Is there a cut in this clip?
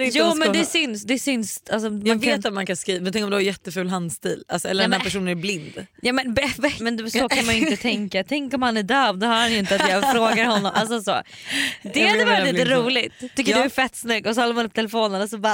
yes; 1 cut; at 6.8 s

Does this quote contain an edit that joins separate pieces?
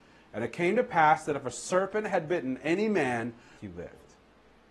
yes; 1 cut; at 3.6 s

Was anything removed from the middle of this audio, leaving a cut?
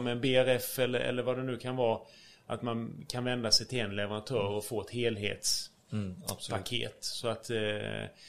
no; 0 cuts

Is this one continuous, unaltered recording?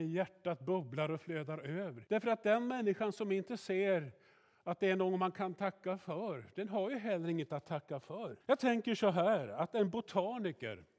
no; 2 cuts; at 2.1 s, 8.4 s

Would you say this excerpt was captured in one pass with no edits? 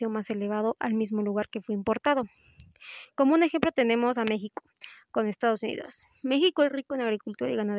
yes; 0 cuts

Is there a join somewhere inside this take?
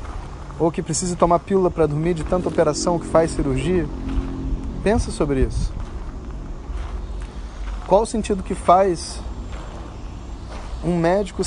no; 0 cuts

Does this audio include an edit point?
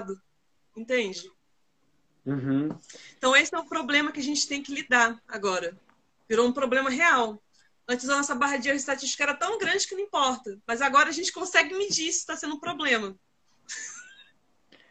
no; 0 cuts

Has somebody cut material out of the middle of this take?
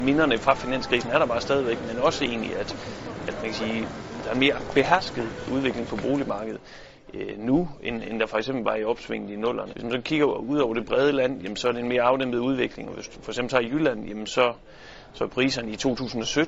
yes; 1 cut; at 9.7 s

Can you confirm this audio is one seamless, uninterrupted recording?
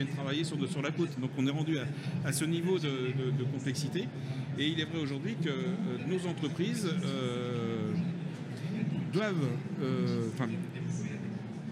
yes; 0 cuts

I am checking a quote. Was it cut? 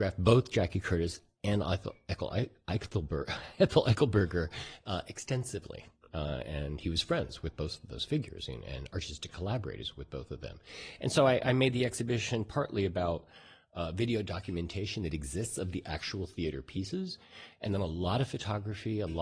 no; 0 cuts

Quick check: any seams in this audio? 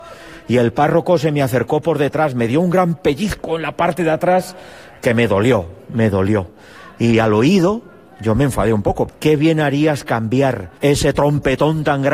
yes; 2 cuts; at 9.1 s, 10.8 s

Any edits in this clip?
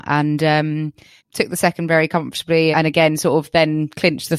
yes; 2 cuts; at 1.2 s, 2.7 s

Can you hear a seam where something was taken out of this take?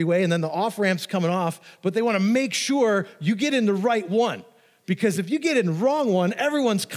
no; 0 cuts

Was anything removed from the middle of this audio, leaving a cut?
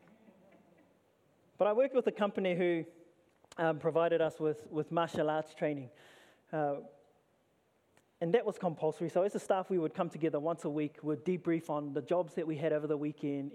no; 0 cuts

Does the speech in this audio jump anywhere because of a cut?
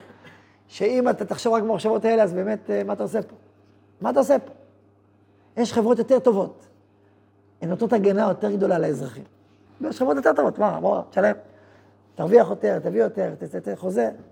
yes; 1 cut; at 9.7 s

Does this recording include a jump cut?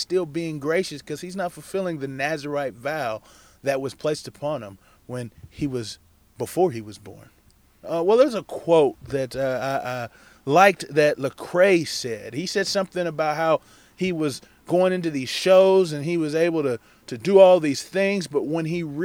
yes; 1 cut; at 7.8 s

